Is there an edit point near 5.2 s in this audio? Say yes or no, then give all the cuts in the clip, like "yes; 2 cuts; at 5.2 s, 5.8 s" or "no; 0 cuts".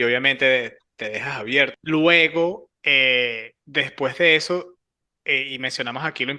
no; 1 cut; at 1.7 s